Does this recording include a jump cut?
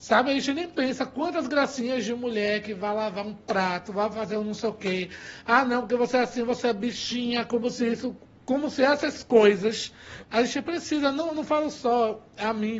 yes; 1 cut; at 10.2 s

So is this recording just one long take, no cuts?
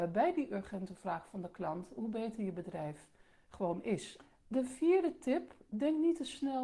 no; 1 cut; at 5.7 s

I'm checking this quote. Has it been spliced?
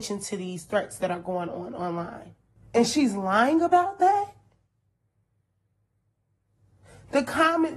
yes; 1 cut; at 2.6 s

